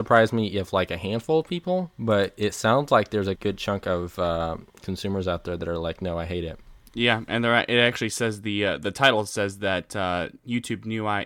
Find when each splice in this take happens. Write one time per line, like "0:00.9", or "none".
0:03.4